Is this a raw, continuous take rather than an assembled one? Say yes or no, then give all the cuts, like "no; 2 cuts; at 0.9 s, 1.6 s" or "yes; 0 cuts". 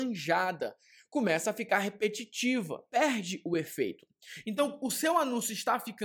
no; 2 cuts; at 2.9 s, 4.4 s